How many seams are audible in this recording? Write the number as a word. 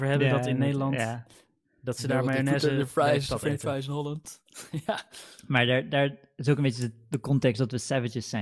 zero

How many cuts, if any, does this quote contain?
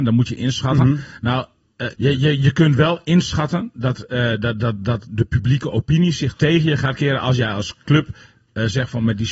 one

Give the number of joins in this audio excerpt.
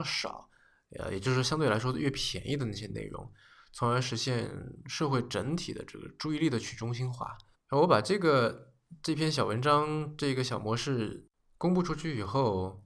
one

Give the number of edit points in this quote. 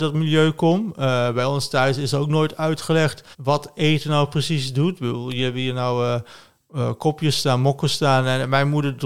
one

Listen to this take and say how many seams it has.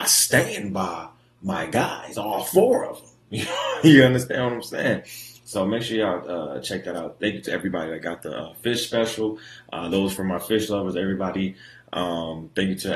zero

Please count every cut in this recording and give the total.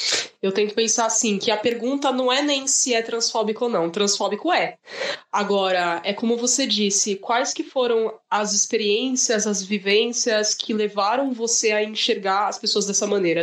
zero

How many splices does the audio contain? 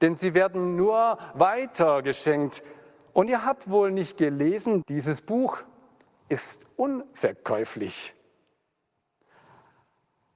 one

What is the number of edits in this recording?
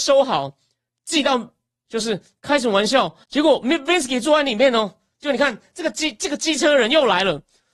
two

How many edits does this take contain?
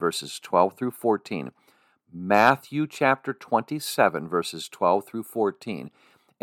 zero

